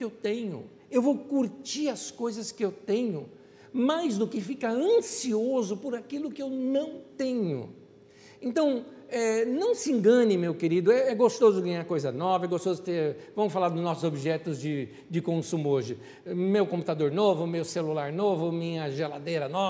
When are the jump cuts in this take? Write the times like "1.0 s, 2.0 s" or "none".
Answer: none